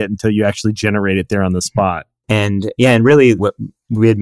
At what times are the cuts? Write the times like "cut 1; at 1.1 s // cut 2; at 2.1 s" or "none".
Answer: cut 1; at 2.2 s